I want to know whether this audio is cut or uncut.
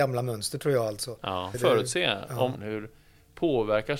cut